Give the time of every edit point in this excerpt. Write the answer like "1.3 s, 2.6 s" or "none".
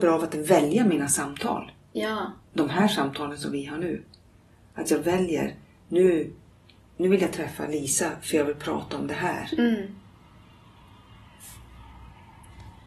none